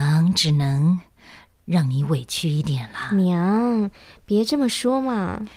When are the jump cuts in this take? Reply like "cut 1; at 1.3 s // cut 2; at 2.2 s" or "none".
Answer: none